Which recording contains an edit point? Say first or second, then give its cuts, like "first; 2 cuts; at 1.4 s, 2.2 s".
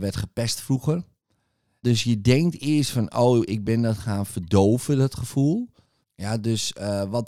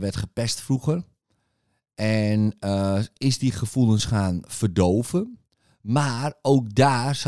first; 2 cuts; at 1.8 s, 6.0 s